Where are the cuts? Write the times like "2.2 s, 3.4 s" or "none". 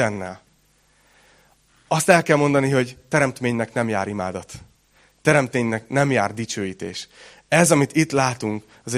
none